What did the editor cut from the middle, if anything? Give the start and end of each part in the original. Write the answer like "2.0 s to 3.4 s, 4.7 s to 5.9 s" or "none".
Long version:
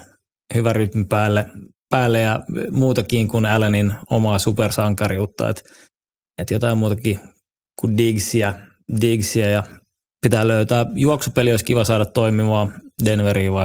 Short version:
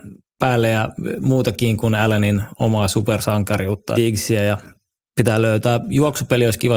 5.5 s to 9.0 s